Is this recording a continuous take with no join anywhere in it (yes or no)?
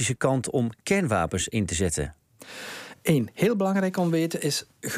yes